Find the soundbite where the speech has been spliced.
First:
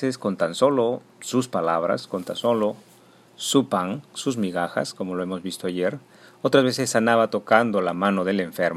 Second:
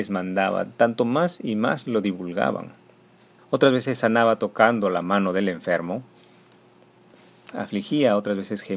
second; 2 cuts; at 3.4 s, 7.5 s

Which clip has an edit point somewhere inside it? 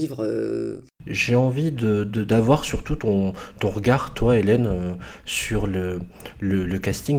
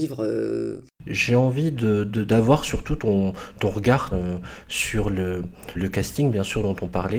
second; 2 cuts; at 4.1 s, 5.7 s

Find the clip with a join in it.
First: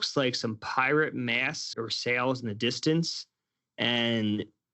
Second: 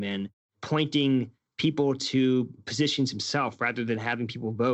first; 1 cut; at 1.7 s

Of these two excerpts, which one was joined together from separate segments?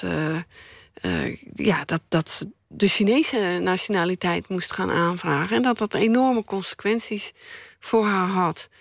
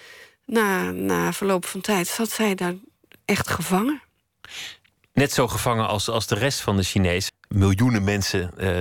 second; 1 cut; at 7.3 s

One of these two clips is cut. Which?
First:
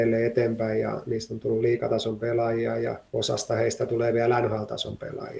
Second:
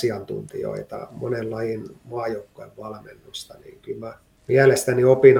first; 1 cut; at 3.1 s

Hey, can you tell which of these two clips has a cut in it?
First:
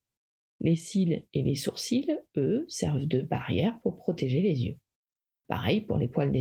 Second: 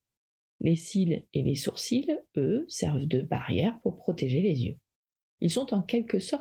second; 1 cut; at 5.2 s

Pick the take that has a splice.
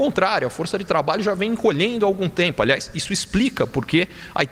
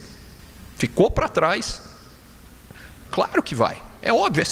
second; 1 cut; at 3.1 s

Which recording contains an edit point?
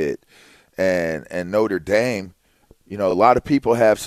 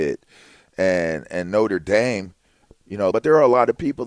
second; 1 cut; at 3.1 s

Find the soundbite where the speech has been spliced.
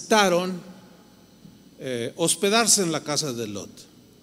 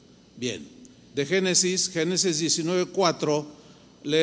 second; 1 cut; at 1.1 s

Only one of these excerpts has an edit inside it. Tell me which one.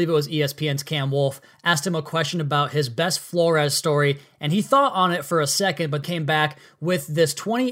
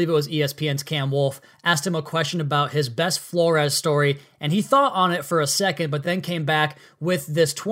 first; 1 cut; at 6.0 s

